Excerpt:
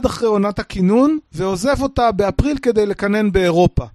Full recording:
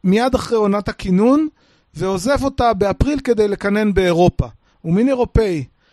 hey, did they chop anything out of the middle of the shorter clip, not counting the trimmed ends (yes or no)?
yes